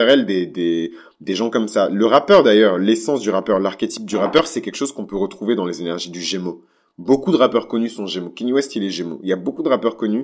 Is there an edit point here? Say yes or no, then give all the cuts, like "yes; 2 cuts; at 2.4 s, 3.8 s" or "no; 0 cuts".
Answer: no; 0 cuts